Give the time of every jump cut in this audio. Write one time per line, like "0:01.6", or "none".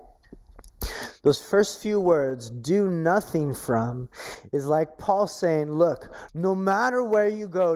0:06.3

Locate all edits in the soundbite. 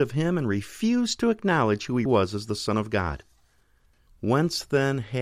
0:02.1
0:04.1

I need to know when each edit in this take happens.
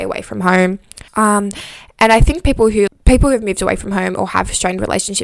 0:01.1
0:02.9

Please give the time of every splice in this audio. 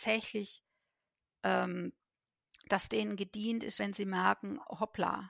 none

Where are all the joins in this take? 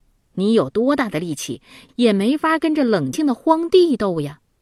0:03.1

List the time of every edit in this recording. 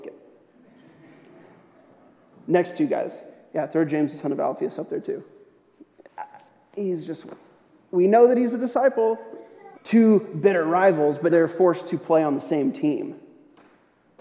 0:09.7
0:11.3

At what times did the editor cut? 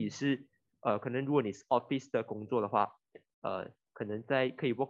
0:03.3

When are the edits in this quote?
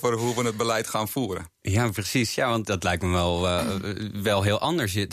0:02.6

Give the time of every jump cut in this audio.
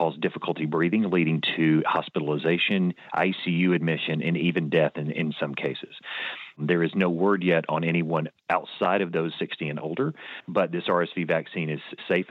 0:06.6

